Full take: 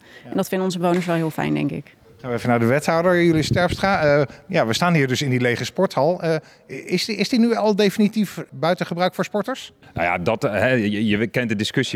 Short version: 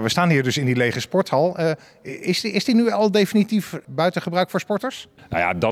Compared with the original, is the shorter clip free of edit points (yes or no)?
yes